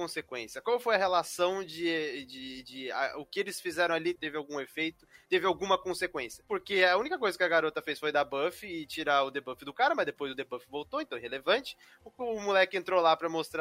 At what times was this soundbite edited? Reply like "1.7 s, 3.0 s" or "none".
4.2 s